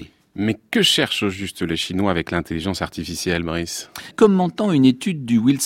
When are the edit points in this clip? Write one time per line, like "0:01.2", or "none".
0:04.1